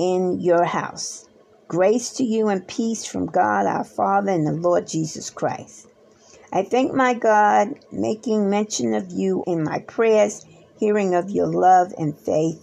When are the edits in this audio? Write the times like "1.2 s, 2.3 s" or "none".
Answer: 9.4 s